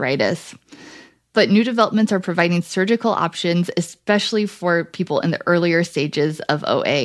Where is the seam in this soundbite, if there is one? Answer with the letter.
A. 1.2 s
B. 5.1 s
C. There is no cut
C